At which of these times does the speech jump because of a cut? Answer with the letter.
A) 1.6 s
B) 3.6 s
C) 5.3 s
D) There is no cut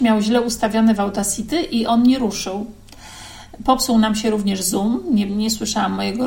C